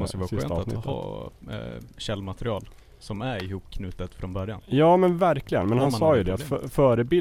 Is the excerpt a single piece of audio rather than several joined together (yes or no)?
yes